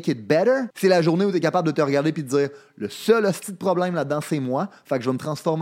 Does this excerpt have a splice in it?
no; 0 cuts

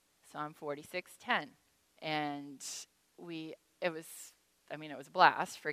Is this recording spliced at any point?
yes; 1 cut; at 1.9 s

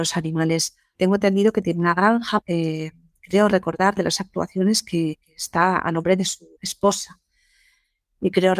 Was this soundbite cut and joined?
yes; 2 cuts; at 2.4 s, 6.5 s

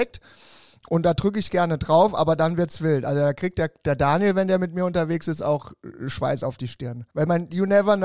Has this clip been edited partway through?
yes; 1 cut; at 7.1 s

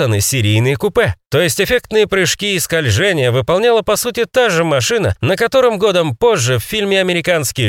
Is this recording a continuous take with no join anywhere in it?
yes; 0 cuts

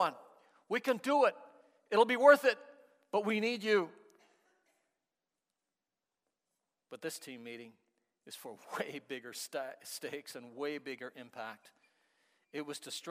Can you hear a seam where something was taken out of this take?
no; 0 cuts

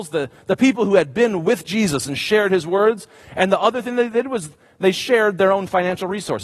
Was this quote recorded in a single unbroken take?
yes; 0 cuts

